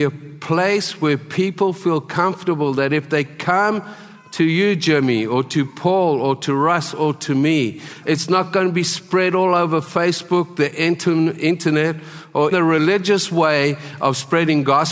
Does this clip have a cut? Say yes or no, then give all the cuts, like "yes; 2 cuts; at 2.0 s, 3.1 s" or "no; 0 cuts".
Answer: yes; 2 cuts; at 8.0 s, 12.5 s